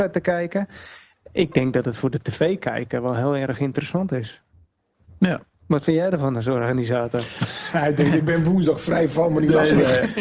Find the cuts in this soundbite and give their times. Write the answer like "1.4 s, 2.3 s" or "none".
none